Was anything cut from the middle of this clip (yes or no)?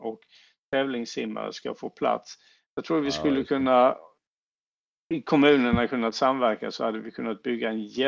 no